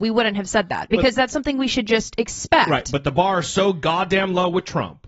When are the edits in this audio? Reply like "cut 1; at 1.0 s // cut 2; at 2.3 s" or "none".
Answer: none